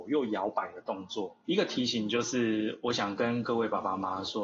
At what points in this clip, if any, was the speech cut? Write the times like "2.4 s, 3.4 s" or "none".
1.4 s